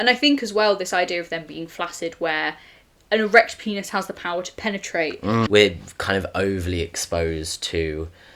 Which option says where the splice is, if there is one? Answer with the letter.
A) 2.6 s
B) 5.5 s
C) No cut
B